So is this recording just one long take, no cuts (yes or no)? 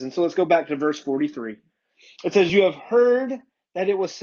yes